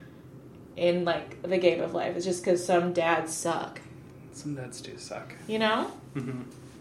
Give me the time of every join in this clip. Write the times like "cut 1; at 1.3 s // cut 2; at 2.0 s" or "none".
none